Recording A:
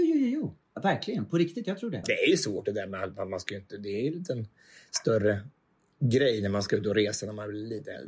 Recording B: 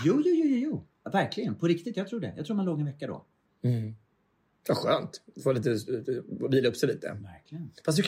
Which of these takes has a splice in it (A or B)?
A